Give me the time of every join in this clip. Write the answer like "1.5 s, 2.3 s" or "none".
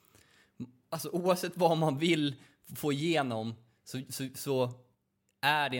none